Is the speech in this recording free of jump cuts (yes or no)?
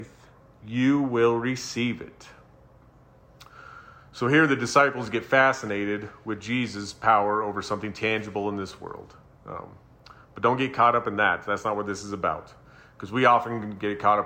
yes